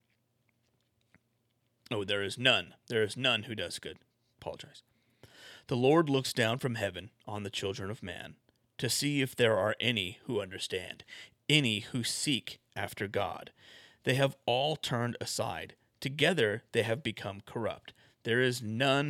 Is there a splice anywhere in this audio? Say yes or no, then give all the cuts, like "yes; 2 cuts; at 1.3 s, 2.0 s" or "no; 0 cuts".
no; 0 cuts